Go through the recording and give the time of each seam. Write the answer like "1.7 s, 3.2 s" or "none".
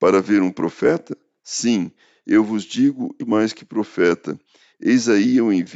3.2 s, 4.7 s